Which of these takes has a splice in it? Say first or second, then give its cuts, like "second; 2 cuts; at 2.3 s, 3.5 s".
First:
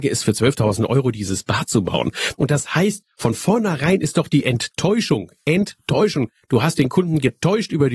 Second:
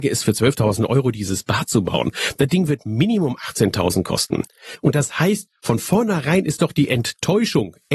first; 1 cut; at 2.3 s